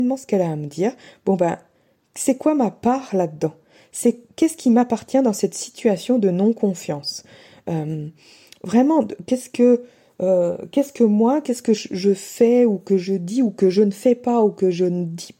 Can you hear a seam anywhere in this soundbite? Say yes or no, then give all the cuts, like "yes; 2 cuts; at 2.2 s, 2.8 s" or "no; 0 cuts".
no; 0 cuts